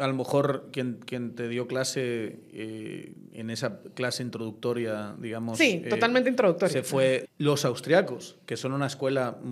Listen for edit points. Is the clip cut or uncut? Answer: cut